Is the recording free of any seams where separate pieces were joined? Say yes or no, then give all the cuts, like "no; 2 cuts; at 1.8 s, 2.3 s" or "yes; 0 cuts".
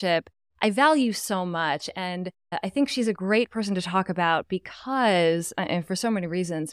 yes; 0 cuts